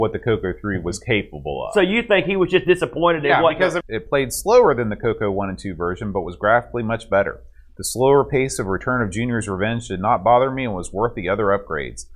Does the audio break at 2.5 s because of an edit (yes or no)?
no